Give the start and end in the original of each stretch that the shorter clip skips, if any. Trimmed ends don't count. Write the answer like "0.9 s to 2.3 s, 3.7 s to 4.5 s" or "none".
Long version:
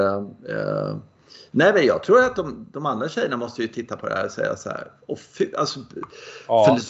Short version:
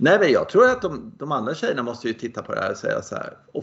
none